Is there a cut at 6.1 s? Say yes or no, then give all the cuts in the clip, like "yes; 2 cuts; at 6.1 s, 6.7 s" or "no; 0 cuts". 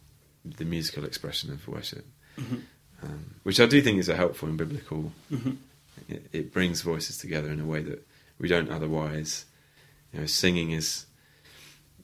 yes; 1 cut; at 6.1 s